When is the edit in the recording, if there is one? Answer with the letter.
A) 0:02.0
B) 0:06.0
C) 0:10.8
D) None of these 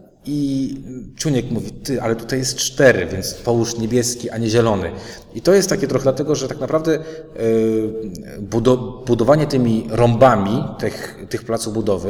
B